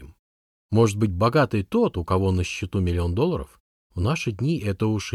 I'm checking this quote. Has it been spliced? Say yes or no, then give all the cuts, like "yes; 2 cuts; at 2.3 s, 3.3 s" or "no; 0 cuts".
yes; 1 cut; at 3.8 s